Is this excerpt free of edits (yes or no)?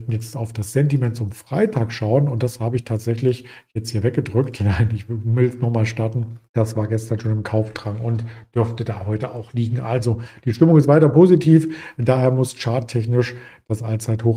no